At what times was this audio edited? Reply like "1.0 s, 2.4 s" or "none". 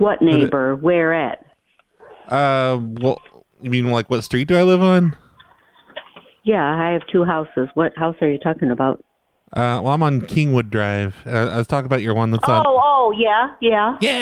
none